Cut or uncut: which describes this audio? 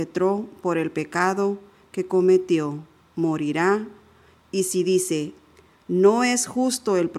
uncut